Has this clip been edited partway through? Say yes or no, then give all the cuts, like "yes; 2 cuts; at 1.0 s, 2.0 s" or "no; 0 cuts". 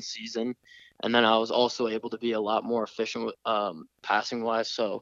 no; 0 cuts